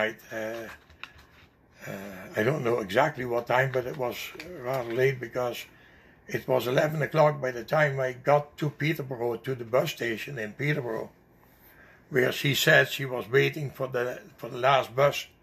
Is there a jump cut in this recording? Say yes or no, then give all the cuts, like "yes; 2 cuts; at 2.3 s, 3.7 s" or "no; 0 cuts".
no; 0 cuts